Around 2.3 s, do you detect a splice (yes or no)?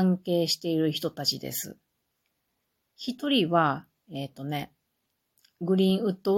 no